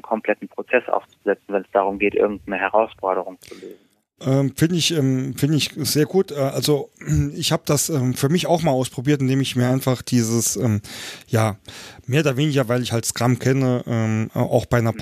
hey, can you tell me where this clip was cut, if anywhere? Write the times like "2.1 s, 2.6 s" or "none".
none

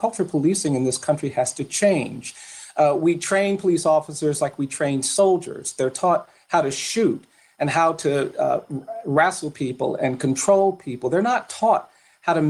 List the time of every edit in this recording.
none

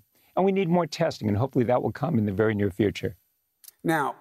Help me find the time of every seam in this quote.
none

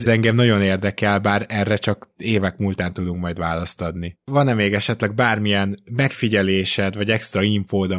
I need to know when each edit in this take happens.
none

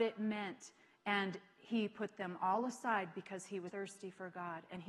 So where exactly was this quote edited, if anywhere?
3.7 s

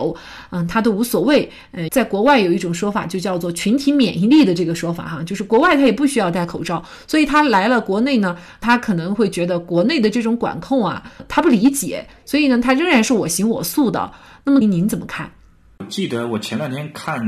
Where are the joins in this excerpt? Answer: 1.9 s, 14.6 s

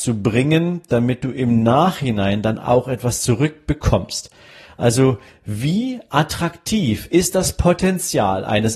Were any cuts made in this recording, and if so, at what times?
none

